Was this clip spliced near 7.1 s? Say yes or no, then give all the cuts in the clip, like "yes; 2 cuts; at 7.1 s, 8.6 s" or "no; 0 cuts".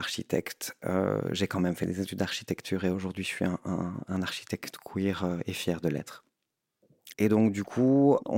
yes; 1 cut; at 7.1 s